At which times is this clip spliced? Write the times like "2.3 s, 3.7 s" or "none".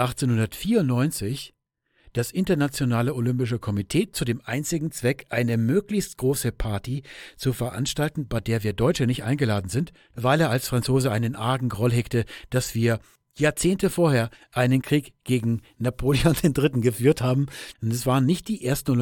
17.7 s